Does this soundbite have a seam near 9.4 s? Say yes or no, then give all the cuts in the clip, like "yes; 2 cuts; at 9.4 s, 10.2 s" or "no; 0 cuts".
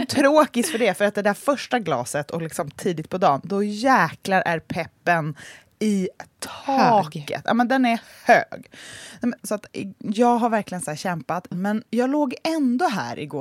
yes; 2 cuts; at 9.4 s, 11.5 s